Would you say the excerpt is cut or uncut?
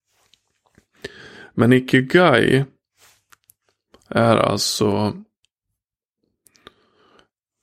uncut